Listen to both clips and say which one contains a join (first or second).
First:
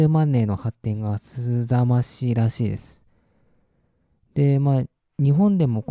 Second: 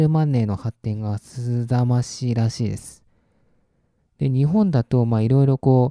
second